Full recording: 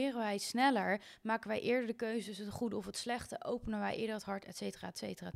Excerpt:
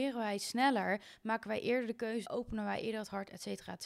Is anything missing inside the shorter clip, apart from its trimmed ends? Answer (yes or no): yes